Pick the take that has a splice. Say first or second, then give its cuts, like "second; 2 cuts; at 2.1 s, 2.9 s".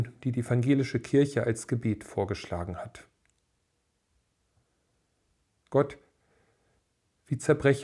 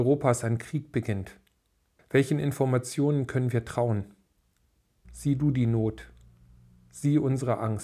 second; 2 cuts; at 2.0 s, 5.0 s